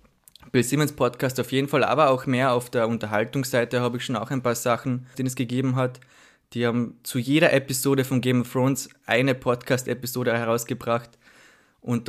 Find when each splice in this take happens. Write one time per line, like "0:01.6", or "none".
0:05.1